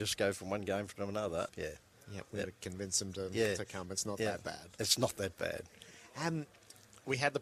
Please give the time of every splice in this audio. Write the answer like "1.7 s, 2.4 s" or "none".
1.5 s